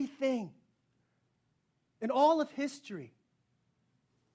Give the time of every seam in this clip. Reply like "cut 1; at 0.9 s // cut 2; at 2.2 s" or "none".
none

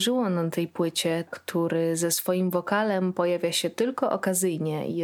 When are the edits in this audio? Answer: cut 1; at 1.3 s

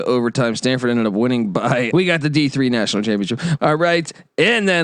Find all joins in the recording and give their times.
cut 1; at 1.9 s // cut 2; at 3.6 s

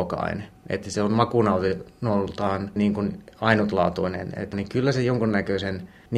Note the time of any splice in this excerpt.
cut 1; at 2.8 s // cut 2; at 4.5 s

